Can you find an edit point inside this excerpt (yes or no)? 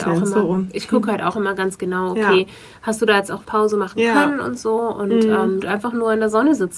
yes